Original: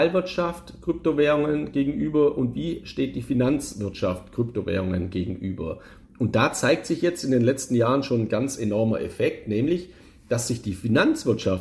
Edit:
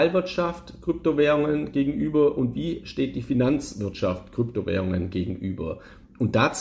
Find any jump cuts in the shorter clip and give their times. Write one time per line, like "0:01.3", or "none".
none